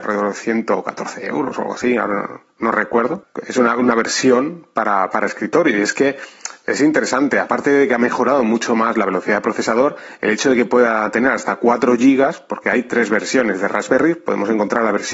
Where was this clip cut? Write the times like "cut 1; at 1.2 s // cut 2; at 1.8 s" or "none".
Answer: none